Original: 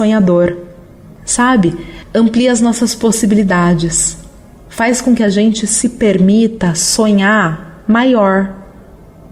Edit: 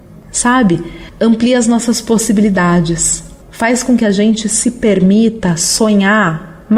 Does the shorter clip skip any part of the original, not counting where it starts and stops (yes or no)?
yes